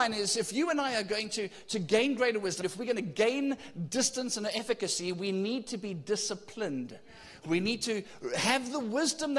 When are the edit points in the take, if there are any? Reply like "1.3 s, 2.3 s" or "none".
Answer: 2.6 s